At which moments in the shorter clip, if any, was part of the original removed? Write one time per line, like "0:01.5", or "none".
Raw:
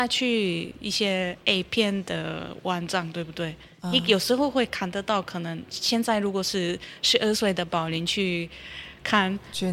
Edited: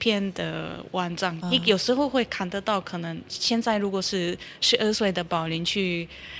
0:01.4